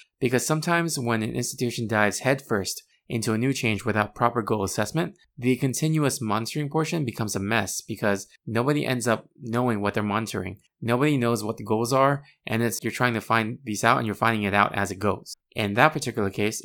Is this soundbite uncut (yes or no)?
no